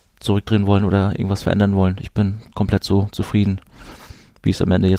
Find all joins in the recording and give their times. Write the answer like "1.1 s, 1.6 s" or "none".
none

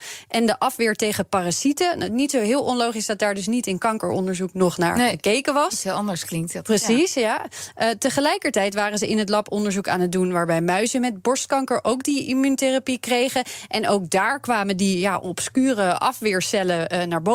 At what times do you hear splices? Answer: none

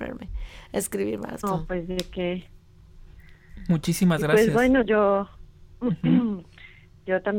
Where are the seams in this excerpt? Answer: 1.4 s

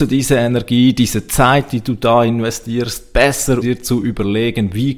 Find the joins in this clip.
3.6 s

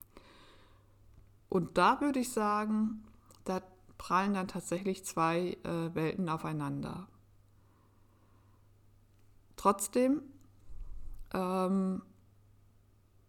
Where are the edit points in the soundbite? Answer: 1.4 s

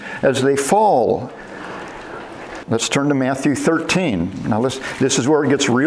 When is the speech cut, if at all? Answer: 2.6 s

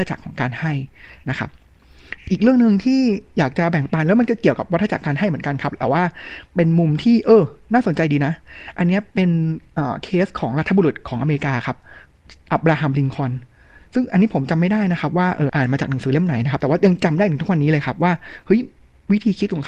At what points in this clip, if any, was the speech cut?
12.5 s, 15.5 s

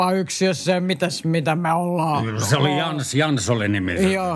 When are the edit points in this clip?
none

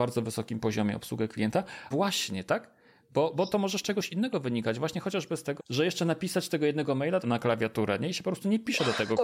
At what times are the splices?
1.9 s, 5.6 s, 7.2 s

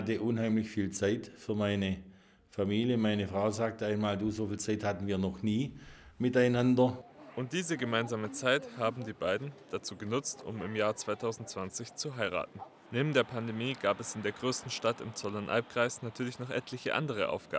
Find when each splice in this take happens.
9.6 s

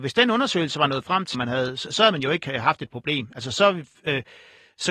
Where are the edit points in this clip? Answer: 1.3 s

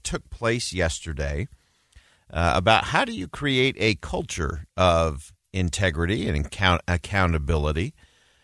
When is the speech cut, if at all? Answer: none

